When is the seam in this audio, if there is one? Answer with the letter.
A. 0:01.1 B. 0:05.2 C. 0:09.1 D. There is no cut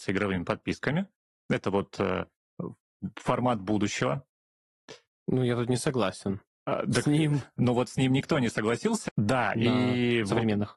C